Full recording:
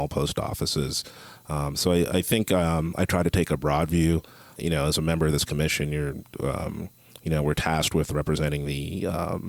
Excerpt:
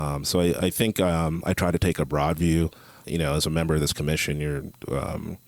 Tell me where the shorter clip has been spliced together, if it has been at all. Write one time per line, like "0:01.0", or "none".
none